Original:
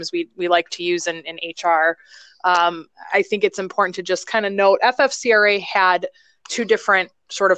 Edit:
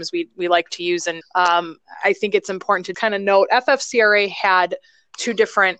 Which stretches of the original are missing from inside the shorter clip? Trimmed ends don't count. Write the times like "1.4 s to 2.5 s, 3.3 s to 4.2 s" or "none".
1.2 s to 2.3 s, 4.0 s to 4.3 s